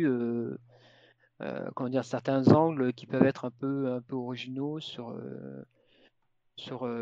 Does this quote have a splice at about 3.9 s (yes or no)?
no